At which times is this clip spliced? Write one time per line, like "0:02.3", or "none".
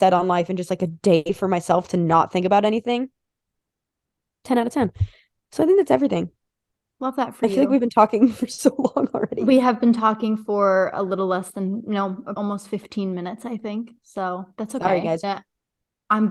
0:12.4
0:15.2